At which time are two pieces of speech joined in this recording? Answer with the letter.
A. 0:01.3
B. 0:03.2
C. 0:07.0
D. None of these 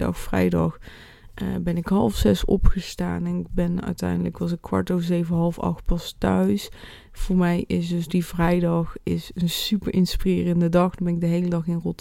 D